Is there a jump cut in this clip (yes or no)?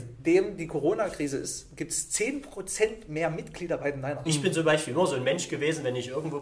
yes